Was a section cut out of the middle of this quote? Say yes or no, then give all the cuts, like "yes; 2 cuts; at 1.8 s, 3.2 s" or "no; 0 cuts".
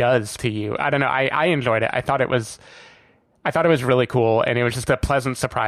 no; 0 cuts